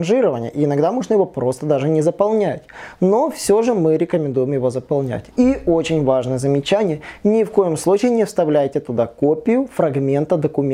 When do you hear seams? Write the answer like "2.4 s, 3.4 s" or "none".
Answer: none